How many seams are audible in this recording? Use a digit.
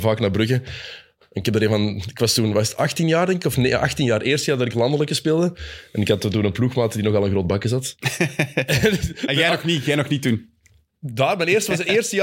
0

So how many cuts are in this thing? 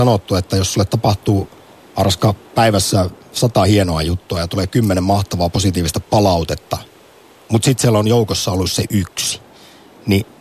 1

